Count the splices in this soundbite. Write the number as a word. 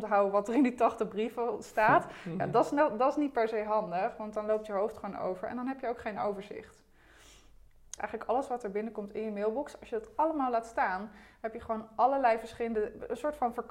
one